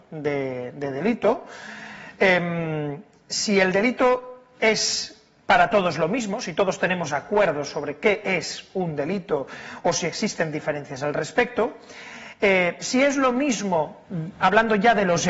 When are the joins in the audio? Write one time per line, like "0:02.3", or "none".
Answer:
none